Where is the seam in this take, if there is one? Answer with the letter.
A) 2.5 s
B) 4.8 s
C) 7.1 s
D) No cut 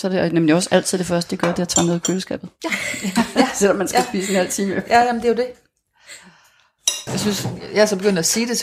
C